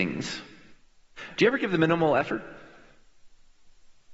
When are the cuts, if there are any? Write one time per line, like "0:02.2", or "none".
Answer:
0:01.4